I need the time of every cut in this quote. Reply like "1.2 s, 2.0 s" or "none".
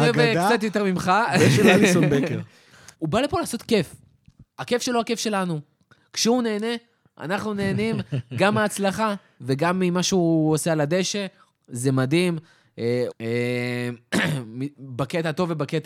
2.9 s, 4.5 s, 13.1 s